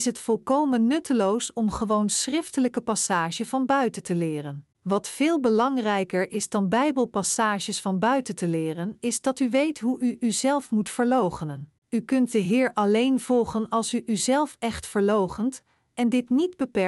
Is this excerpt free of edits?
no; 2 cuts; at 4.7 s, 11.8 s

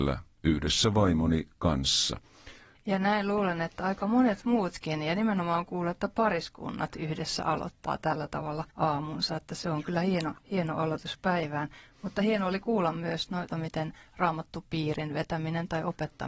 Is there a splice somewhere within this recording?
yes; 3 cuts; at 2.7 s, 8.7 s, 13.5 s

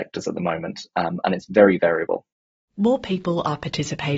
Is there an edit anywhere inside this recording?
no; 0 cuts

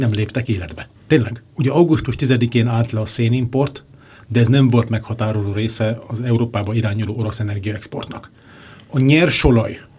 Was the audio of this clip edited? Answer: yes; 1 cut; at 1.0 s

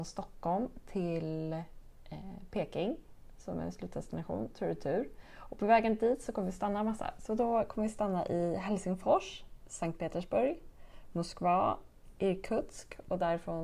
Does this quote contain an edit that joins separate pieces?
no; 0 cuts

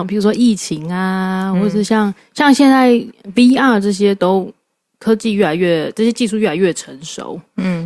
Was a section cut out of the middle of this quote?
no; 0 cuts

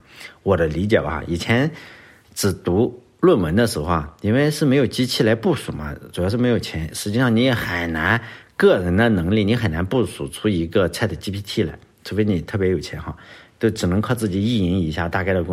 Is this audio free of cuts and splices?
yes; 0 cuts

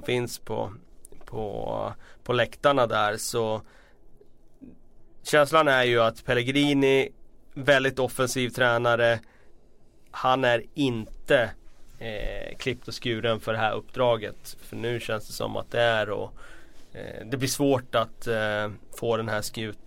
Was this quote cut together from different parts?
yes; 1 cut; at 14.6 s

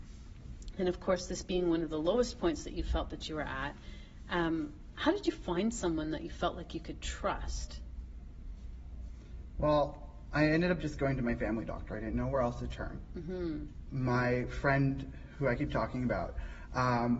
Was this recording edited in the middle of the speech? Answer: no; 0 cuts

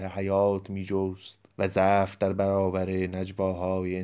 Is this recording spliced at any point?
yes; 1 cut; at 1.5 s

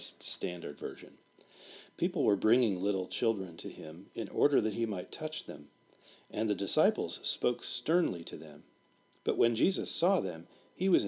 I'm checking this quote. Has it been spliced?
no; 0 cuts

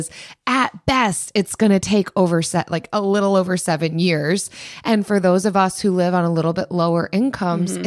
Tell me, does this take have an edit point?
no; 0 cuts

